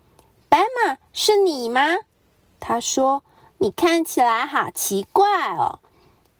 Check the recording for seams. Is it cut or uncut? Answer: uncut